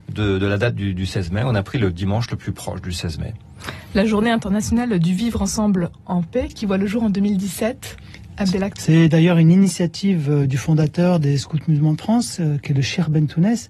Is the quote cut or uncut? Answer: cut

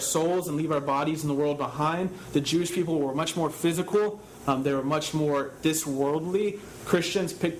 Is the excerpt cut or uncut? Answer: uncut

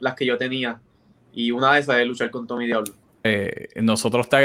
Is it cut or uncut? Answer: cut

